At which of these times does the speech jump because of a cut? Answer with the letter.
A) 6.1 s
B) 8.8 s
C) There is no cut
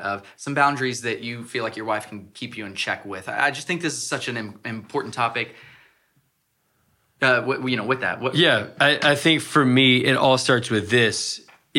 C